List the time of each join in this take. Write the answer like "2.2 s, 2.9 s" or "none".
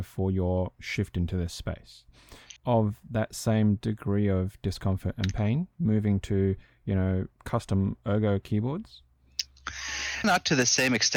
2.6 s, 7.3 s, 10.2 s